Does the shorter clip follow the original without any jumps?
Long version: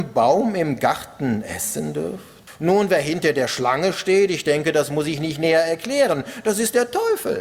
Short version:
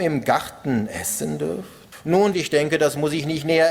no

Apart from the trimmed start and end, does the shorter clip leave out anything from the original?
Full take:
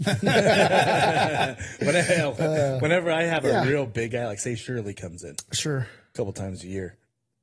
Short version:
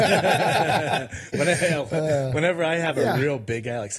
no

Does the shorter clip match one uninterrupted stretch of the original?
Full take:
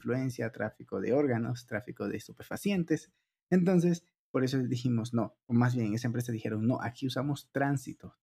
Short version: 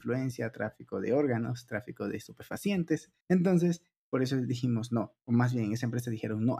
no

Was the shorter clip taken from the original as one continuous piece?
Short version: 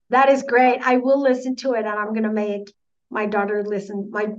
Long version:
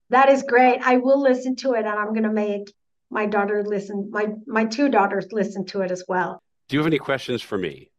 yes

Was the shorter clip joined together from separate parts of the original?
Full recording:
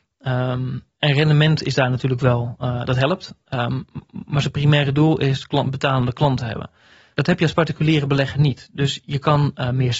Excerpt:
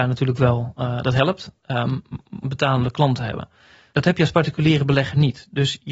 yes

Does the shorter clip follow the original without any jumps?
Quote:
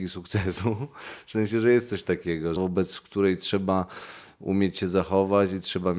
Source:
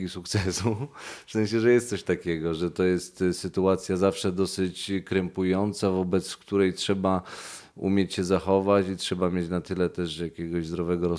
no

